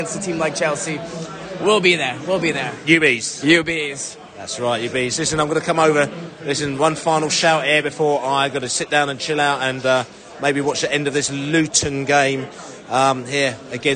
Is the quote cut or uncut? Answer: uncut